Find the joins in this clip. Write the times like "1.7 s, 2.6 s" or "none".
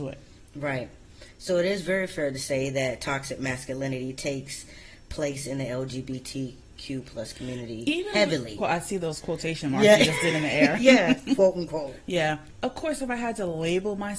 8.6 s